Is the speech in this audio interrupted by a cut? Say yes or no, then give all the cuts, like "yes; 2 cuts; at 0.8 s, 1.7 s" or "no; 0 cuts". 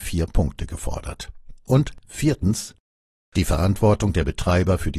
yes; 1 cut; at 1.7 s